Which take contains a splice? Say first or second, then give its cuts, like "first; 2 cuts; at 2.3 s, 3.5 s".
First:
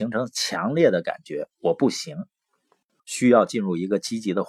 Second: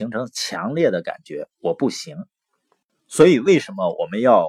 first; 1 cut; at 3.0 s